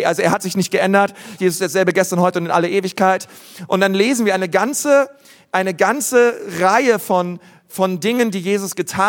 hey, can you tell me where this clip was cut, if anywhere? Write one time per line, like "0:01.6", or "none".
0:01.4